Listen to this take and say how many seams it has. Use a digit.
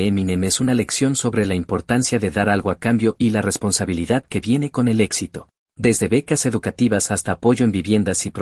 1